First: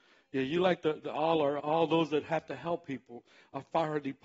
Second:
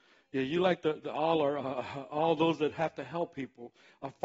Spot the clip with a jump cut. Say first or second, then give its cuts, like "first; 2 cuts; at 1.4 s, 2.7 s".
first; 1 cut; at 1.6 s